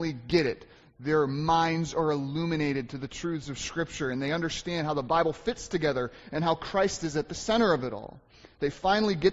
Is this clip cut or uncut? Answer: uncut